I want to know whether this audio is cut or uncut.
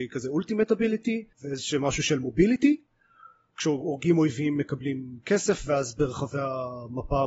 cut